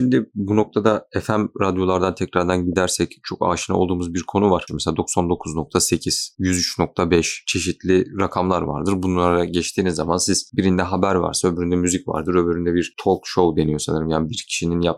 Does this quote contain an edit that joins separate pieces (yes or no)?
yes